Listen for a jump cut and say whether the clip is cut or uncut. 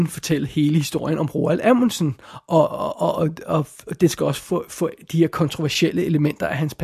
uncut